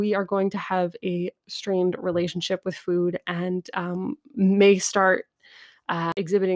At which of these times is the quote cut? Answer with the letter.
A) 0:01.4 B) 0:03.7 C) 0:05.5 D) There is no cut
D